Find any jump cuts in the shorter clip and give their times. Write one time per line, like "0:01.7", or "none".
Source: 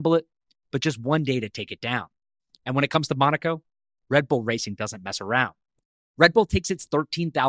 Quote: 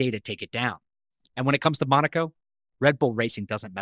none

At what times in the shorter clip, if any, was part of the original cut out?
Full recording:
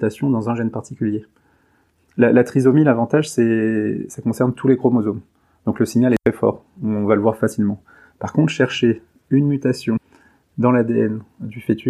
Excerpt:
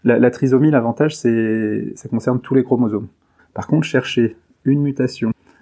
0:03.4

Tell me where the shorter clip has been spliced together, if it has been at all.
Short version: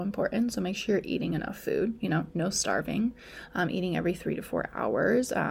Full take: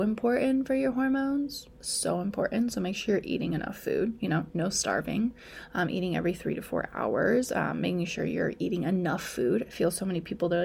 none

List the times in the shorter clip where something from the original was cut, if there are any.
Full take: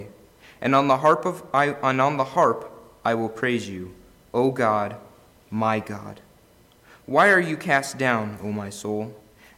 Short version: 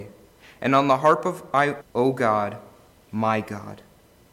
0:01.8

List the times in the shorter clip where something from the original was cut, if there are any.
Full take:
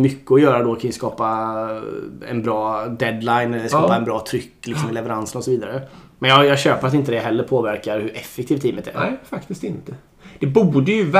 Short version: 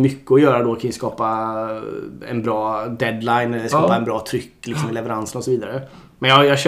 none

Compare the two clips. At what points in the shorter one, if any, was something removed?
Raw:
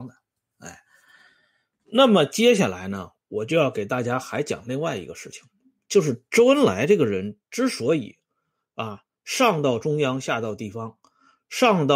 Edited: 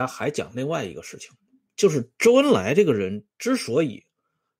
none

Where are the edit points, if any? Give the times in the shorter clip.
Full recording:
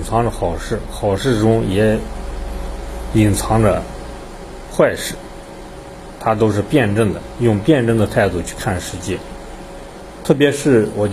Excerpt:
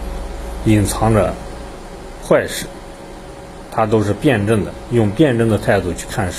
none

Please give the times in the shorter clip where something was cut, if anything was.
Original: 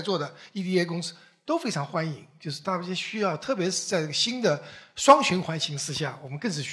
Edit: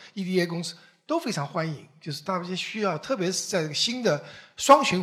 none

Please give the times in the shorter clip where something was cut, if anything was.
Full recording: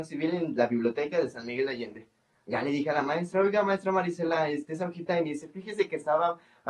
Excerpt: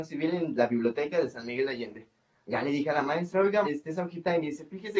0:03.6

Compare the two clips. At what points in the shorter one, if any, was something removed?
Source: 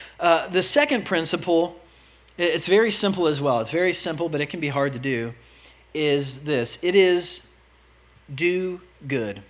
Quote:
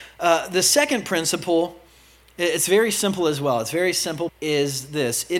0:04.3

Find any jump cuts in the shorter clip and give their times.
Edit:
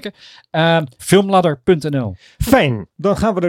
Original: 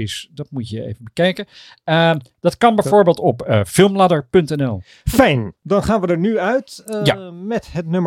0:01.0

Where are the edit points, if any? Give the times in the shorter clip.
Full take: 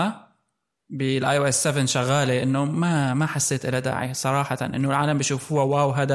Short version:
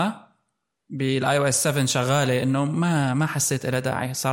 none

